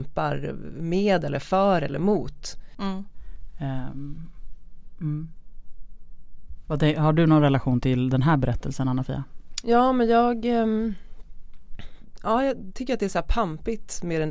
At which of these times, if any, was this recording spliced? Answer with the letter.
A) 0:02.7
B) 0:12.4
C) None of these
A